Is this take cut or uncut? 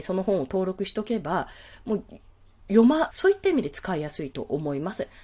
cut